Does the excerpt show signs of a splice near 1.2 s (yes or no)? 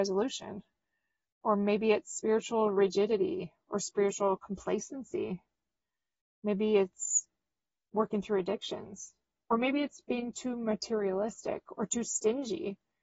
no